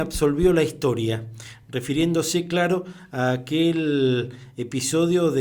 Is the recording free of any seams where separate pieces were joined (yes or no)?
yes